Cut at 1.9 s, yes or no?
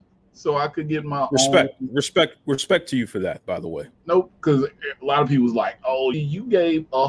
no